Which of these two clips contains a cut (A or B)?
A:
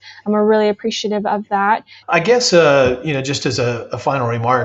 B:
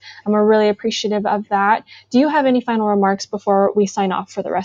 A